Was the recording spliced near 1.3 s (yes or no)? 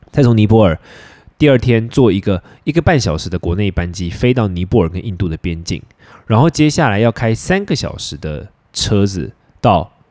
no